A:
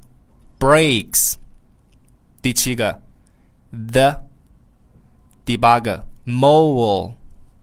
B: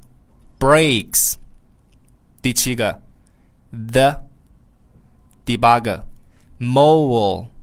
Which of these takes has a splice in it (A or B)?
A